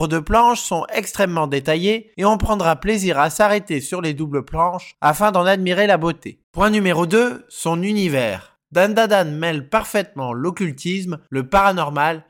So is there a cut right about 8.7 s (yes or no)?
no